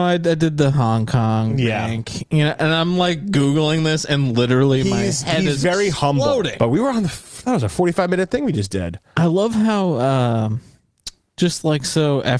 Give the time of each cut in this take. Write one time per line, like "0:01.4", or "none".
0:06.6